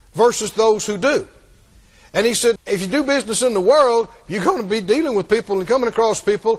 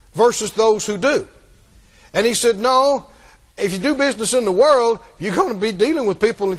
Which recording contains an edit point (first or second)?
first